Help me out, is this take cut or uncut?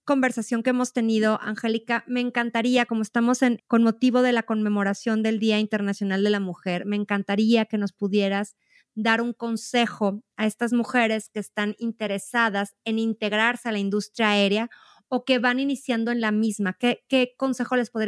uncut